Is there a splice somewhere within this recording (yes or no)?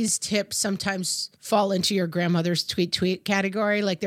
no